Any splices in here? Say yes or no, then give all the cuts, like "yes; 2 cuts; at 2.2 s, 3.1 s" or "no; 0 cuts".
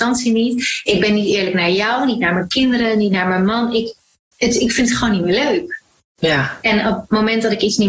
yes; 1 cut; at 4.3 s